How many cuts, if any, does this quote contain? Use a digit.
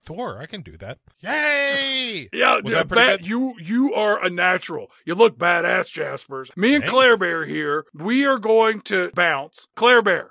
0